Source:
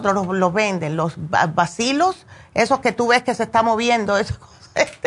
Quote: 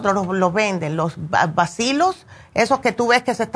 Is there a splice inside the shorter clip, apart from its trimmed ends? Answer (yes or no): no